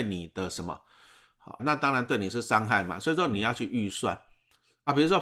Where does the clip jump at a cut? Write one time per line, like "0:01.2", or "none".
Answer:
0:01.6